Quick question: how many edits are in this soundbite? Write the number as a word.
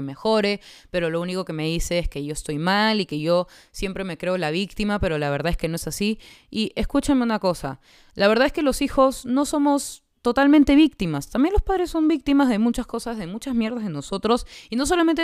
zero